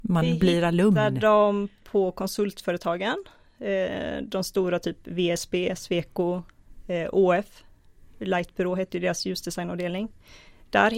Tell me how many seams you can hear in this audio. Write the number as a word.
zero